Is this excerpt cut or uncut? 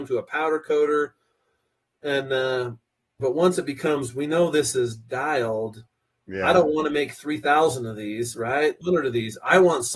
cut